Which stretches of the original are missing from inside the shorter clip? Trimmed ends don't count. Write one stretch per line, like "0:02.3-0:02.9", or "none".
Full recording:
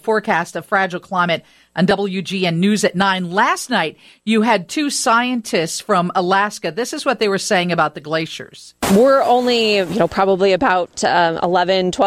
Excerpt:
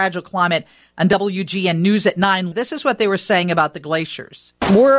0:03.3-0:06.7